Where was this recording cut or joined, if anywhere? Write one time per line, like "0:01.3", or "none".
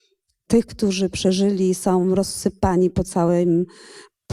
none